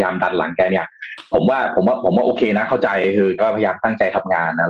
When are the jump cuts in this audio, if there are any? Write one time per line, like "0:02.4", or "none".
0:03.4